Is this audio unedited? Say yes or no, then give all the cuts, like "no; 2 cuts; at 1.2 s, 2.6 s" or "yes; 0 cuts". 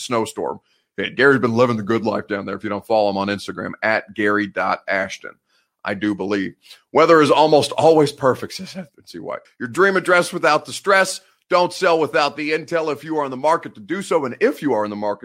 no; 1 cut; at 9.5 s